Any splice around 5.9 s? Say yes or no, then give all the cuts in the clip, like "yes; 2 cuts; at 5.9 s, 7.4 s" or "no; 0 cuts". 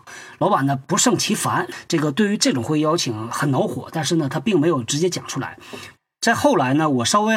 yes; 1 cut; at 5.9 s